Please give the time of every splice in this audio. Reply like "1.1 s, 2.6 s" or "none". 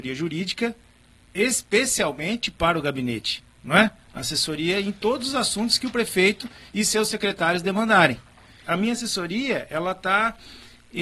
8.6 s

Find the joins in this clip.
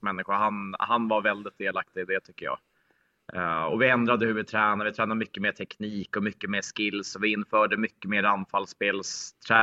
none

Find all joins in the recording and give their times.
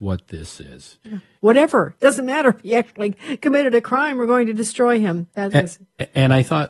1.4 s

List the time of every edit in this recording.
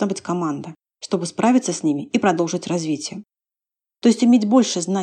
4.0 s

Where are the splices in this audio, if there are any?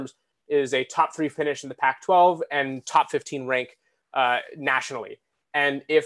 none

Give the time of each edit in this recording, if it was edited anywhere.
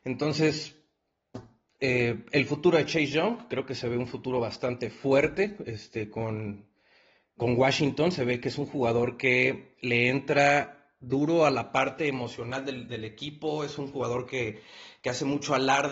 7.4 s

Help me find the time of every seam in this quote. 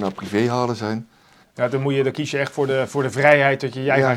1.4 s

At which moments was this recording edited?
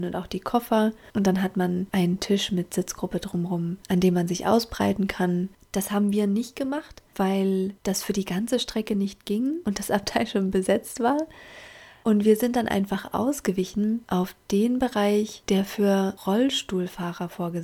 5.6 s

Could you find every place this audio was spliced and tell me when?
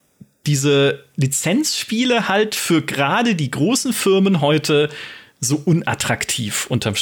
none

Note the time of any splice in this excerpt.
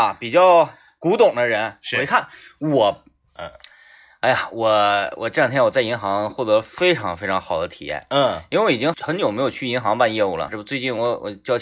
3.4 s, 8.9 s, 10.5 s

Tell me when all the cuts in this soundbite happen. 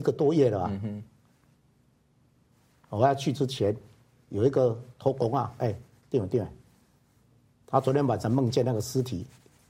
5.6 s

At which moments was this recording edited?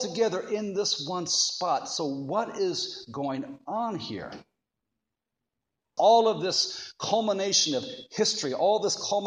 6.0 s

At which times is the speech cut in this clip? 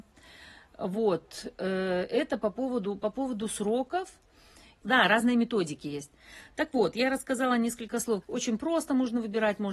4.8 s, 8.2 s

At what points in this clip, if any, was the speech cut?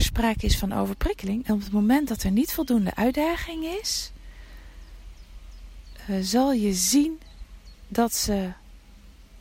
1.4 s

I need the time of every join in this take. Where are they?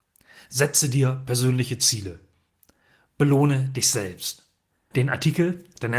4.9 s

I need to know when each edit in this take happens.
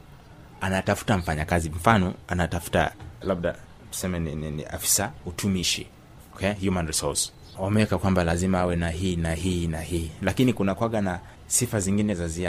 3.2 s

